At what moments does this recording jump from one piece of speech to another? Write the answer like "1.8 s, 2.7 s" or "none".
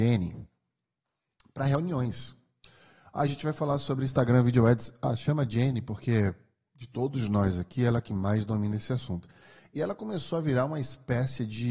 none